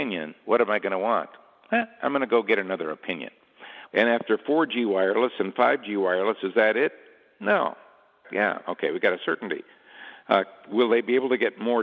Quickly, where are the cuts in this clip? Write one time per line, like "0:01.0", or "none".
0:03.9
0:08.2

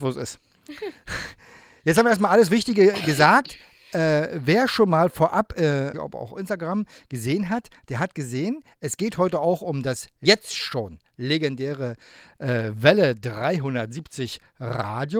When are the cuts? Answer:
0:05.9

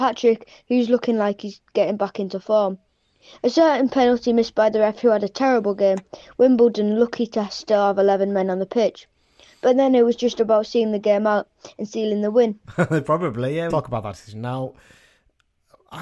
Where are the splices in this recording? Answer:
0:12.6
0:13.7

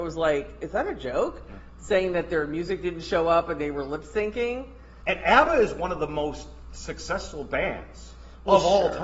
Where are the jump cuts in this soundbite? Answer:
0:05.0

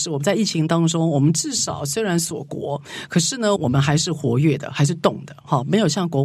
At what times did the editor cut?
0:03.6

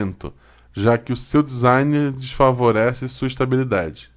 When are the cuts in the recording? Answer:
none

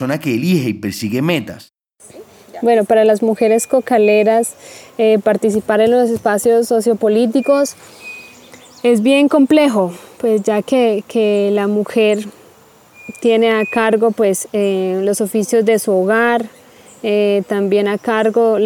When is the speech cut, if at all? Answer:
none

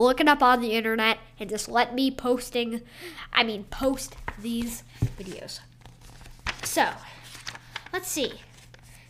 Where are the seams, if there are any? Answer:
none

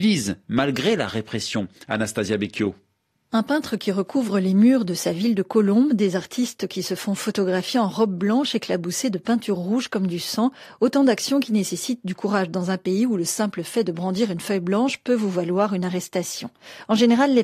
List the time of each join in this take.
none

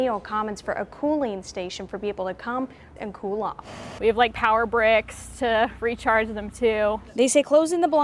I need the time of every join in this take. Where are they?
0:03.0
0:04.0

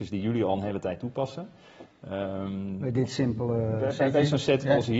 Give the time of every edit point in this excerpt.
none

